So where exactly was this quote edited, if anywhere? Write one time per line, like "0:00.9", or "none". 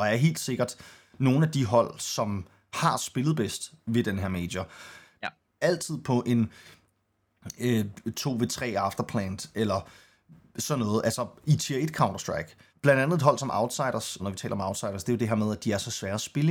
0:05.6
0:12.7
0:14.2